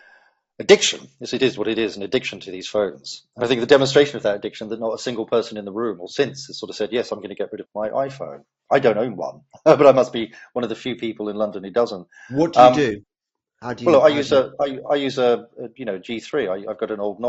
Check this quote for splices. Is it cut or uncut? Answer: cut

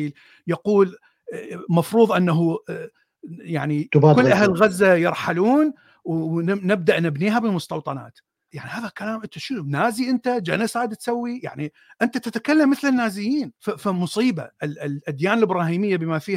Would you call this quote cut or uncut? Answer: cut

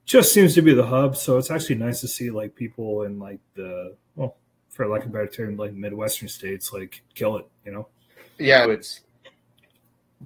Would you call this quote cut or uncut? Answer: cut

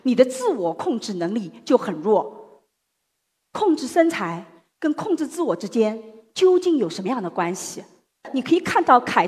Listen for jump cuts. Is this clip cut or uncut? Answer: uncut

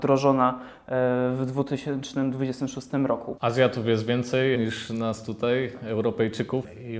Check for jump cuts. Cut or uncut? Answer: cut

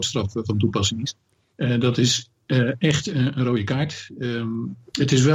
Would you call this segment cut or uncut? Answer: uncut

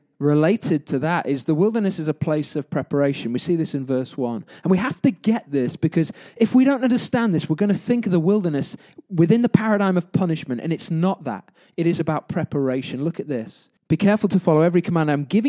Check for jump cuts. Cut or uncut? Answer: cut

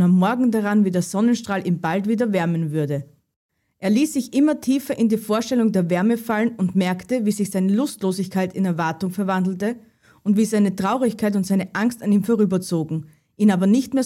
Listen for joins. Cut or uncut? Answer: uncut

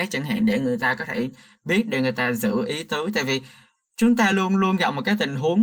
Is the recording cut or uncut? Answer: uncut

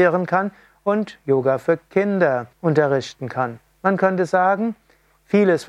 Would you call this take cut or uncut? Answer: cut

